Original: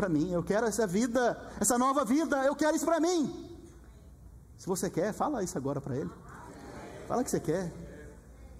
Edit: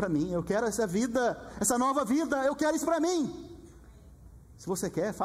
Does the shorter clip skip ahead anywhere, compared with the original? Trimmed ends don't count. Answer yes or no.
no